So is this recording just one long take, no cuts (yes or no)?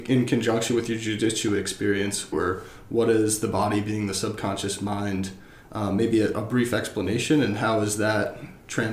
no